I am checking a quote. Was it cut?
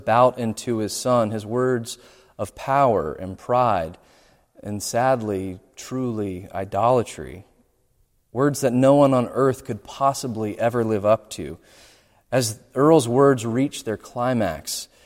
no; 0 cuts

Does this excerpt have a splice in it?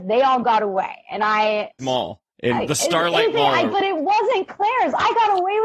yes; 2 cuts; at 1.8 s, 3.7 s

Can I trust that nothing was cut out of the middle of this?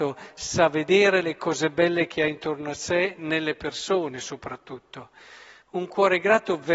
yes; 0 cuts

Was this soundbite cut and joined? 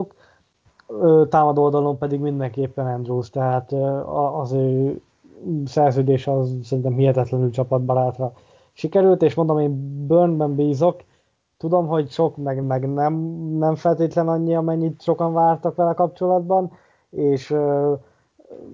yes; 1 cut; at 12.6 s

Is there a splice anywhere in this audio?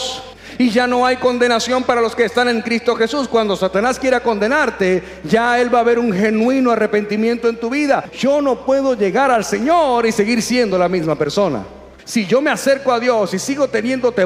yes; 1 cut; at 12.0 s

